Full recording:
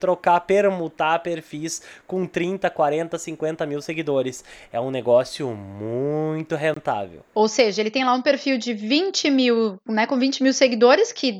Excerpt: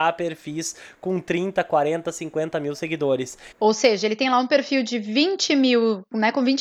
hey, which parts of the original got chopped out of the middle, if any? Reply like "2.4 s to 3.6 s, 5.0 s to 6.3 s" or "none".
4.6 s to 7.3 s